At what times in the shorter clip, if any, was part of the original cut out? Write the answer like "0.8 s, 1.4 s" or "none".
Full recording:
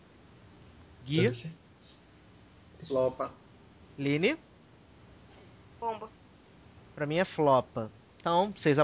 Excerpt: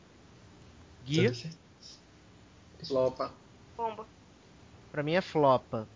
3.6 s